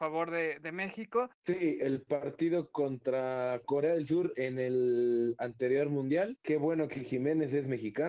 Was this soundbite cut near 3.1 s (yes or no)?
no